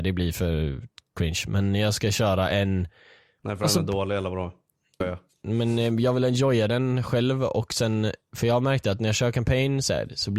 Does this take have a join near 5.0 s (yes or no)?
yes